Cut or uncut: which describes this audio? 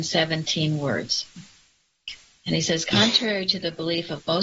uncut